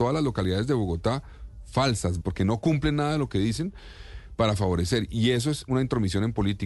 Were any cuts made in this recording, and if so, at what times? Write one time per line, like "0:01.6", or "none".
0:02.2